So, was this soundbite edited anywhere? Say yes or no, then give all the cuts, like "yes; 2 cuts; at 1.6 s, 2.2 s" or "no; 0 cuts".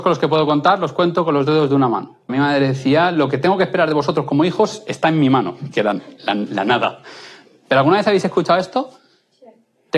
yes; 1 cut; at 2.3 s